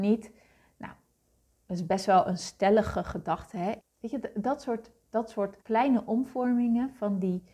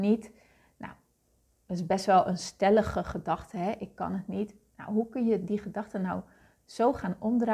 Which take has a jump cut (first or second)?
first